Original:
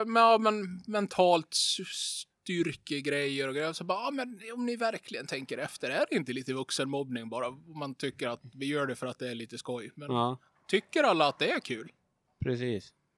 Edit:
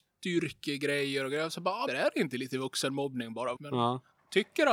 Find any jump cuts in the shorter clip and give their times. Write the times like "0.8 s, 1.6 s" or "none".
1.9 s, 3.6 s